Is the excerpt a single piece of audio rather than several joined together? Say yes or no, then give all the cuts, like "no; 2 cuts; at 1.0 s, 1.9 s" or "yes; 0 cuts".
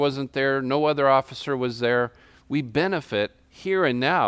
no; 1 cut; at 2.4 s